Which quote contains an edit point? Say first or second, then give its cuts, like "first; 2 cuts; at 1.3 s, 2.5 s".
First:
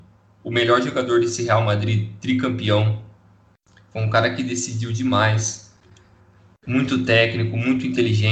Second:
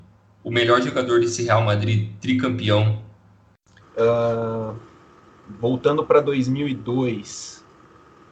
second; 1 cut; at 3.8 s